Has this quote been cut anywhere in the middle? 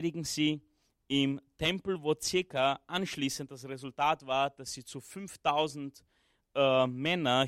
no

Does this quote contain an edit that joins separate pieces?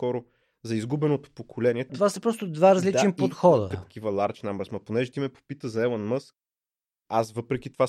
yes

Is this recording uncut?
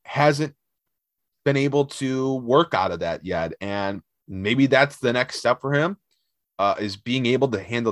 yes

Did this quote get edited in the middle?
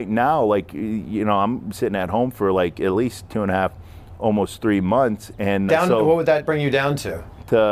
yes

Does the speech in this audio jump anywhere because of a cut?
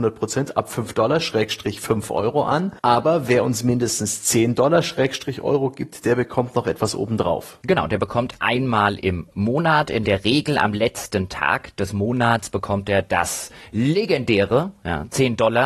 yes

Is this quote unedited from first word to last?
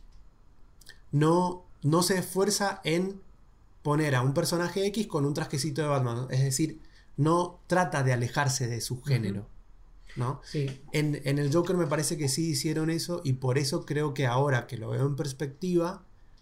yes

